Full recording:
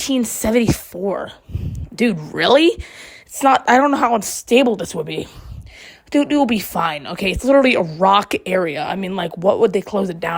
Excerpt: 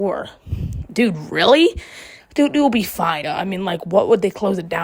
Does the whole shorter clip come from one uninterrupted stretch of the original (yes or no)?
no